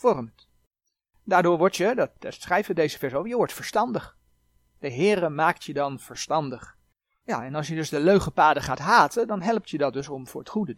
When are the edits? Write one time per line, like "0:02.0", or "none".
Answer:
0:07.2